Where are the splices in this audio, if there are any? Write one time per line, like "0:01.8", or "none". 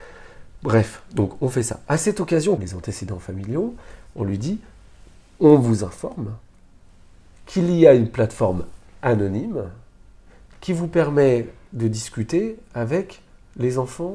0:02.6